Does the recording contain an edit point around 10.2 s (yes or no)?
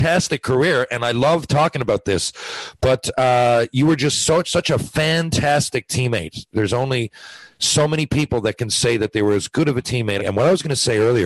yes